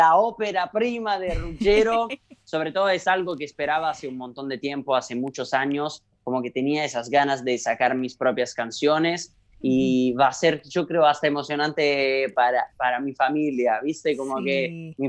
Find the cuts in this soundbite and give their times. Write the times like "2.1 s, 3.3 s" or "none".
none